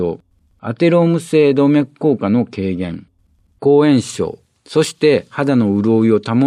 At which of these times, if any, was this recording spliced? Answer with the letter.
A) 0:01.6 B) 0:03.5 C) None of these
C